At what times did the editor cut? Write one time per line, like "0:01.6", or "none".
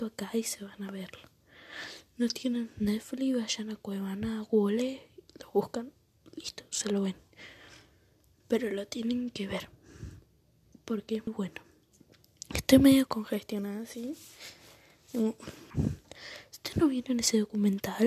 0:11.3
0:15.7